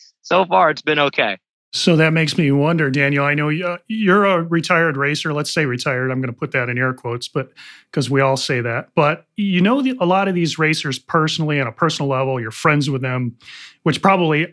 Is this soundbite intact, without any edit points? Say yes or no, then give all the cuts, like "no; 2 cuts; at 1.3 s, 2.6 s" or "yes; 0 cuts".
yes; 0 cuts